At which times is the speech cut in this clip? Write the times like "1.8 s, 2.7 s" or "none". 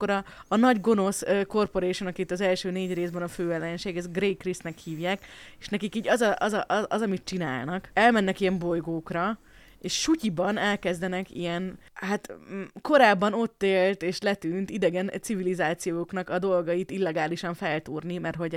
none